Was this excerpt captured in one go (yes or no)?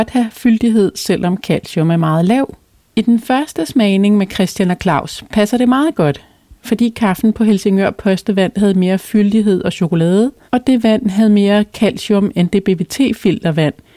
no